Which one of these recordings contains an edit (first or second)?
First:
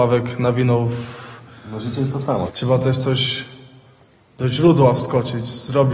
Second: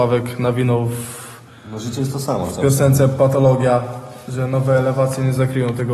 first